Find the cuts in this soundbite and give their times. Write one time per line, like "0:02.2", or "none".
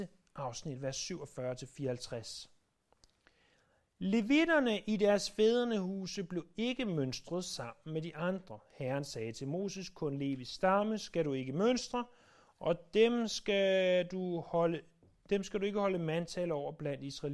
none